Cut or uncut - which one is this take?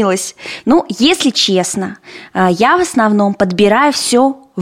uncut